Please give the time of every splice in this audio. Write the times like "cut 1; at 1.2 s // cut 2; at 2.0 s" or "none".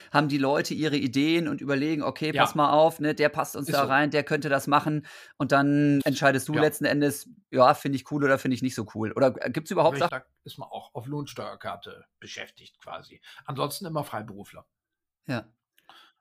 cut 1; at 6.0 s // cut 2; at 10.1 s